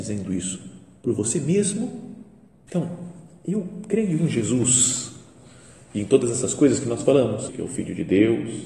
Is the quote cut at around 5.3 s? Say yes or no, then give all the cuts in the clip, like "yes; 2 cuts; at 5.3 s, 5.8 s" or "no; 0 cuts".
no; 2 cuts; at 2.7 s, 7.5 s